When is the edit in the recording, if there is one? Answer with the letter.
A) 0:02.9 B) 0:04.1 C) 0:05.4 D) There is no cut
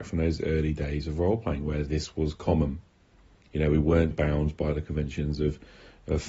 B